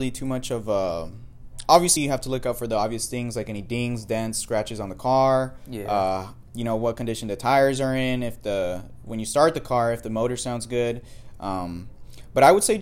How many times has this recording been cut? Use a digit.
0